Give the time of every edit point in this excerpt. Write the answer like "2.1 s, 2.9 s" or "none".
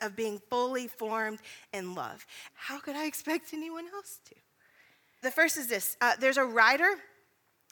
2.5 s, 5.2 s